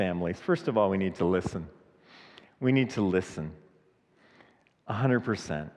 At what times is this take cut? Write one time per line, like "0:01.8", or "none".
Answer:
none